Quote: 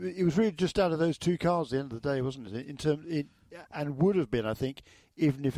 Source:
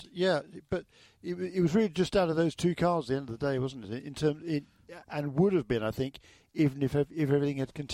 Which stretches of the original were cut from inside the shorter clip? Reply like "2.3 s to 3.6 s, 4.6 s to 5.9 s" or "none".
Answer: none